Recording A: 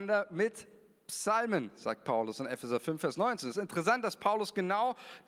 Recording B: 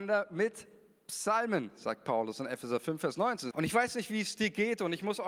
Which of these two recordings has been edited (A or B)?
B